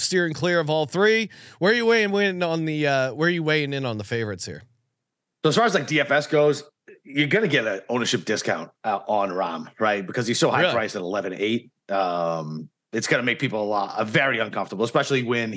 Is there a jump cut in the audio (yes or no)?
no